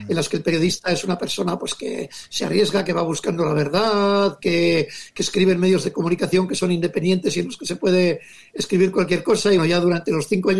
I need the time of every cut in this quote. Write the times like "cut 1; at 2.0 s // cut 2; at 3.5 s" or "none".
cut 1; at 9.6 s